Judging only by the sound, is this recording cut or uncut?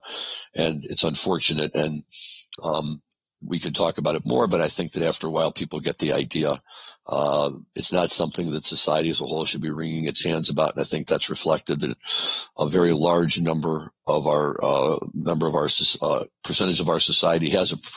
uncut